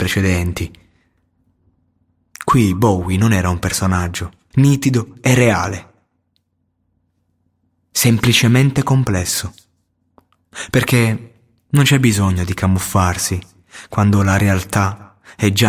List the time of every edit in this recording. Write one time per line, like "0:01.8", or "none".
0:04.5